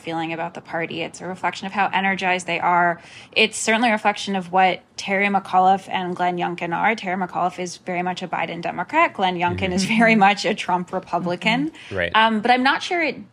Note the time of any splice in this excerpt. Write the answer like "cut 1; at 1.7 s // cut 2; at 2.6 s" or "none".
none

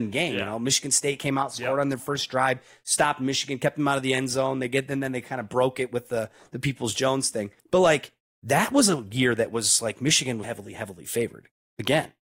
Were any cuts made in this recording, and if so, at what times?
cut 1; at 7.6 s // cut 2; at 10.4 s

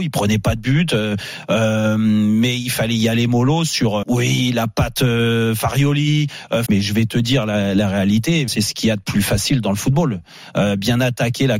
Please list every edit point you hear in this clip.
cut 1; at 4.0 s // cut 2; at 6.7 s // cut 3; at 8.5 s

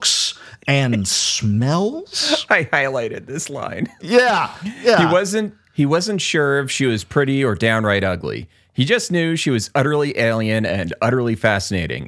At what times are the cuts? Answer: cut 1; at 2.5 s

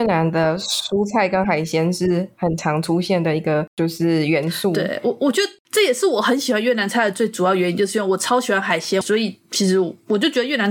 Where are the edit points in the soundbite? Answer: cut 1; at 9.0 s

